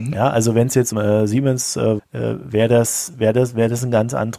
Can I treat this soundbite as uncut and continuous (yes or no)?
no